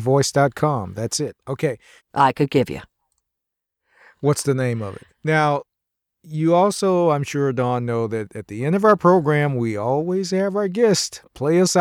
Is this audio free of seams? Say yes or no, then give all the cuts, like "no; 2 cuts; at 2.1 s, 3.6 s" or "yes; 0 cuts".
no; 2 cuts; at 2.0 s, 5.1 s